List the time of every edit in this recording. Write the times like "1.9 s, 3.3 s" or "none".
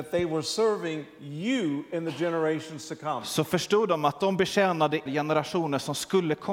5.1 s